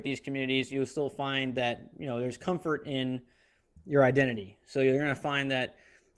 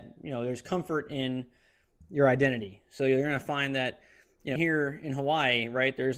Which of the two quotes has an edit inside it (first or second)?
second